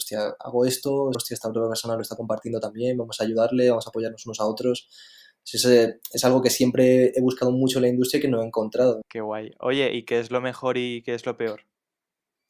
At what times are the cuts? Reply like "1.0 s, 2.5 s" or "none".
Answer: 1.1 s, 9.0 s